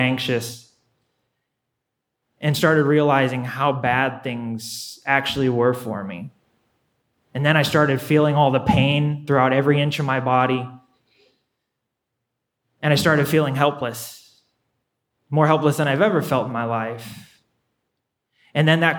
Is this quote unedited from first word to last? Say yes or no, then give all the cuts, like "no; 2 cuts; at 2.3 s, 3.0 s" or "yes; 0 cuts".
yes; 0 cuts